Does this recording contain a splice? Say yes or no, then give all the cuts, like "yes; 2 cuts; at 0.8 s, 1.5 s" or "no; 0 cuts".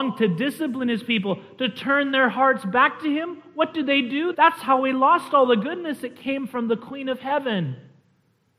yes; 1 cut; at 4.3 s